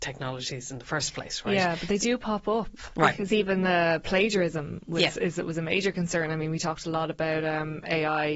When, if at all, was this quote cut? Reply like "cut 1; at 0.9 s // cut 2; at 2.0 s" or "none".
none

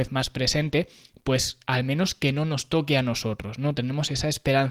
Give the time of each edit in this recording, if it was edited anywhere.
none

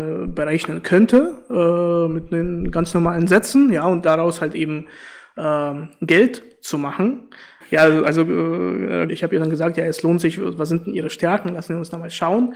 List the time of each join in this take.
cut 1; at 7.6 s // cut 2; at 9.1 s

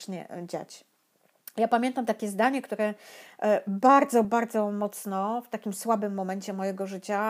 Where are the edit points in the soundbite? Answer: cut 1; at 4.2 s

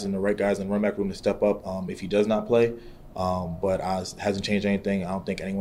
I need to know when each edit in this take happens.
none

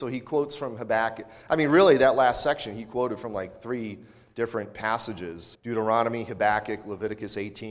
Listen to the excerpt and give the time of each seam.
cut 1; at 5.5 s

